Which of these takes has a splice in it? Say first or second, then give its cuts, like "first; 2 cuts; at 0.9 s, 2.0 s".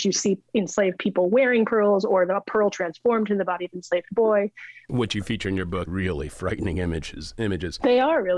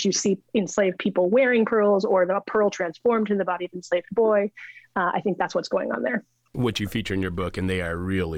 first; 2 cuts; at 4.8 s, 5.9 s